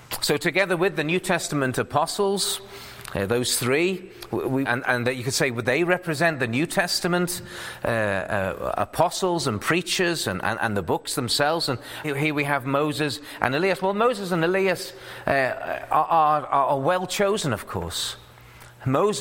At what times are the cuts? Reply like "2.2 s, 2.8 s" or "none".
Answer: 4.6 s, 12.0 s